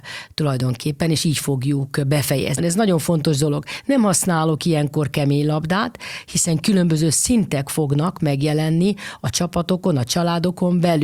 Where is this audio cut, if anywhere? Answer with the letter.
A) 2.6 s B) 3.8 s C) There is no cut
A